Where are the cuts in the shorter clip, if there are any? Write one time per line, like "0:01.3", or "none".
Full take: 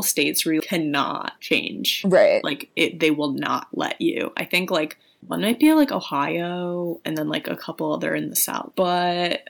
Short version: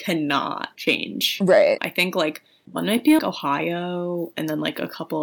0:01.8
0:03.2